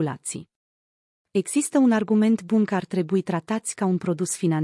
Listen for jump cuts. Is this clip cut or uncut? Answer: uncut